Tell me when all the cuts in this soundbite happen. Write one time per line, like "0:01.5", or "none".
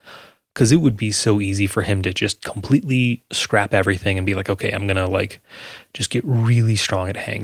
none